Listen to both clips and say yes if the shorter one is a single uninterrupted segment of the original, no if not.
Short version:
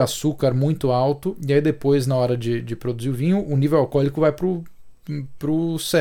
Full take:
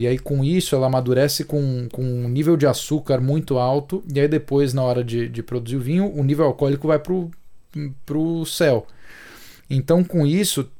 yes